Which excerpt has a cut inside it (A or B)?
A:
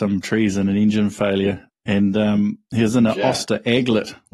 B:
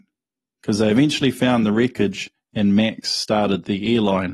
A